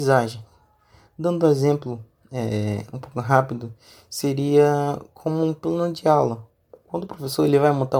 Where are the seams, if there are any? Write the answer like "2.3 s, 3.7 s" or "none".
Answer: none